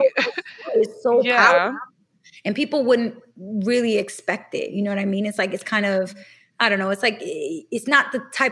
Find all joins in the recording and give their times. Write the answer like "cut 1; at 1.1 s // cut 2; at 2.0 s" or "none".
none